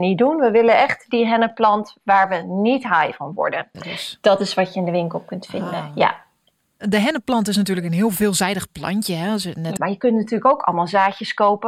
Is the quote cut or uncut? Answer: cut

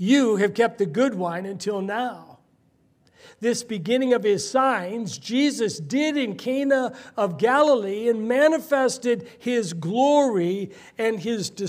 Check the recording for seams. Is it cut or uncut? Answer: uncut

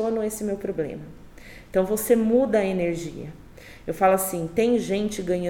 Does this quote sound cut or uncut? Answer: uncut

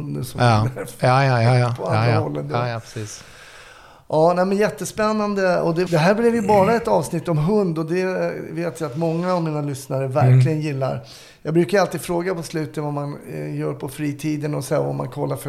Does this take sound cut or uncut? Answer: cut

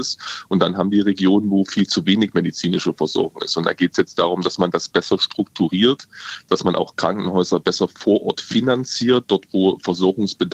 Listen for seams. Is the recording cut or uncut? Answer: cut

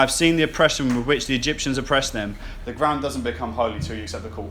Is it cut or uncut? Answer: cut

